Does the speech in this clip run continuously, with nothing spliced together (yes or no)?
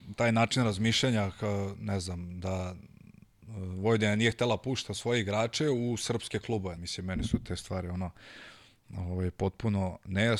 no